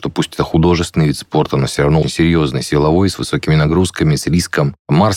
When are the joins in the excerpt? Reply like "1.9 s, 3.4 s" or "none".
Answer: 2.0 s